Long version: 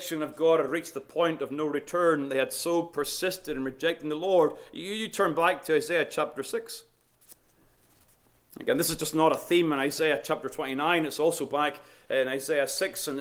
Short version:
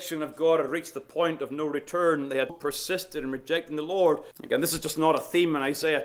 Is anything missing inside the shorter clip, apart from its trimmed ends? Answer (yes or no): yes